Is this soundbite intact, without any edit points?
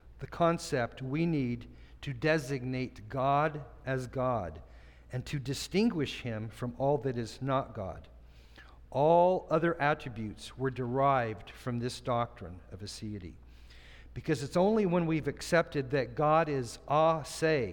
yes; 0 cuts

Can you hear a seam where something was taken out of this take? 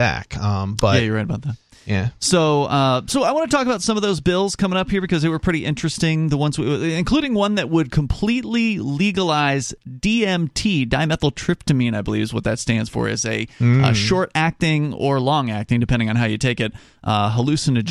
no; 0 cuts

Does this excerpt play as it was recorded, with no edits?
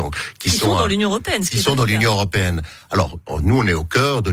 yes; 0 cuts

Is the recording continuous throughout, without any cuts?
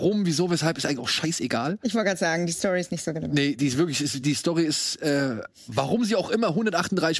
yes; 0 cuts

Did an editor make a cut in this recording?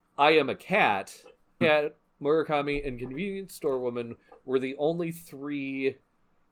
yes; 1 cut; at 1.6 s

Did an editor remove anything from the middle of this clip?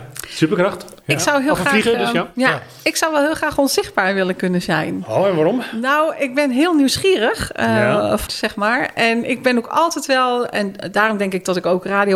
yes; 1 cut; at 8.3 s

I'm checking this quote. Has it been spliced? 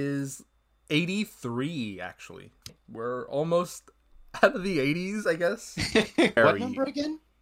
yes; 2 cuts; at 2.7 s, 6.4 s

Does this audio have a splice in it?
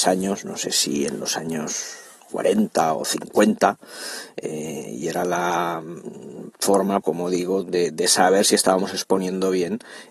yes; 1 cut; at 7.0 s

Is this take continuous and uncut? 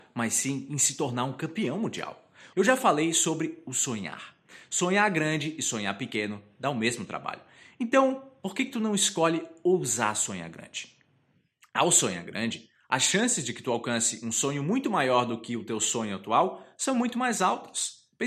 no; 1 cut; at 2.5 s

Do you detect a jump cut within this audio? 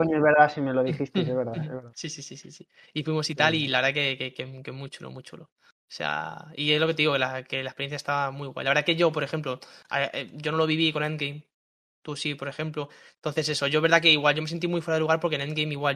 no; 0 cuts

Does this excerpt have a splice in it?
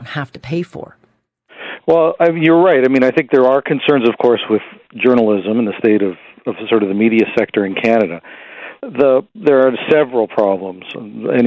no; 0 cuts

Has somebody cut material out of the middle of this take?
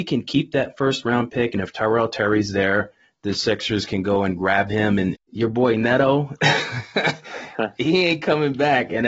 yes; 1 cut; at 5.2 s

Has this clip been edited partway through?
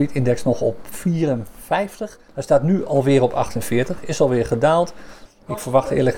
yes; 2 cuts; at 2.3 s, 5.3 s

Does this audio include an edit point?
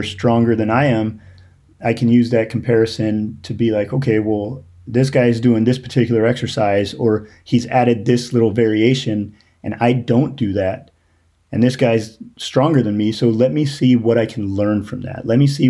no; 0 cuts

